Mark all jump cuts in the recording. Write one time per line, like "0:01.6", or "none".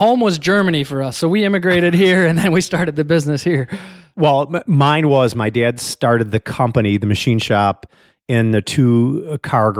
none